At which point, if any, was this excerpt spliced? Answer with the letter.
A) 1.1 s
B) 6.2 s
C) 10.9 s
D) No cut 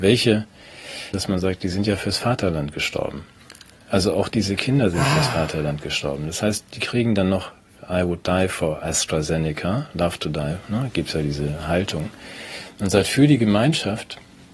A